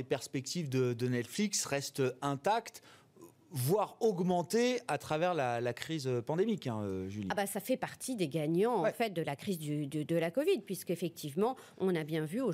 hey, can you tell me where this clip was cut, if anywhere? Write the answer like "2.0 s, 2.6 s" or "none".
none